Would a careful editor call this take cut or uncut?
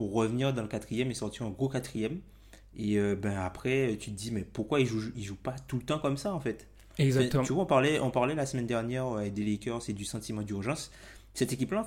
uncut